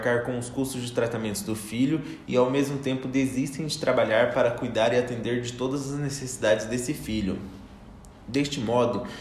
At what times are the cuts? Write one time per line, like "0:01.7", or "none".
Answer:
none